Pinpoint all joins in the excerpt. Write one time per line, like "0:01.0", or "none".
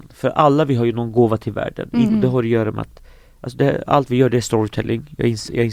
0:02.1